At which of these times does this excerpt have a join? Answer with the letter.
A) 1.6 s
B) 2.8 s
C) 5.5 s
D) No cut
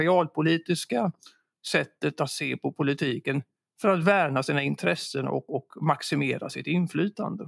C